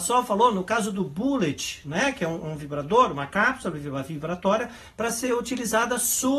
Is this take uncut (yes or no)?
yes